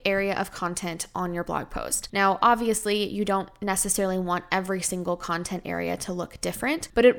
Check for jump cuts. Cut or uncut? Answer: uncut